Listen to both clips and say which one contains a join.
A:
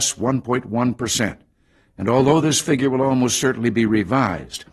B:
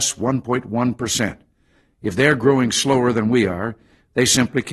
B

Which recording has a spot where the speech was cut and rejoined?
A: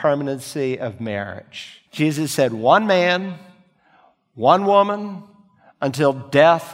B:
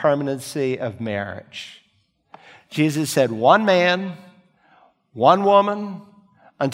A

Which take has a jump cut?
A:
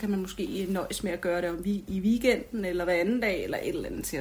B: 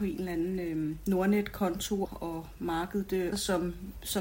B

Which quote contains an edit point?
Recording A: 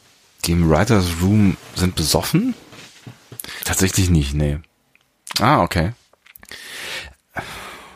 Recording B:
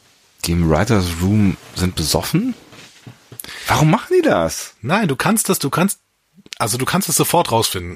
A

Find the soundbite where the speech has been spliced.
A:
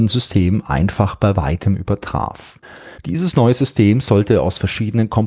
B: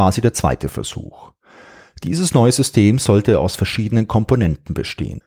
A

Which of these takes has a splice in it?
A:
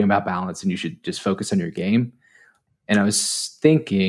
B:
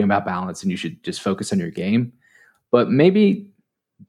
A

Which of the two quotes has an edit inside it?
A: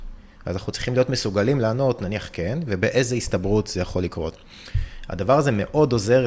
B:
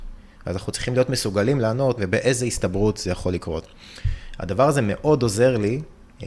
B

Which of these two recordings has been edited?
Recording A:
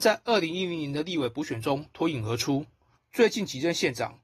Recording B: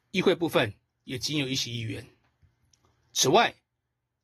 A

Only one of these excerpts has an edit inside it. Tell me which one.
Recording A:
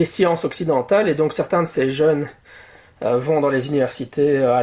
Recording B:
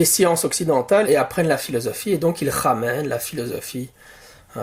B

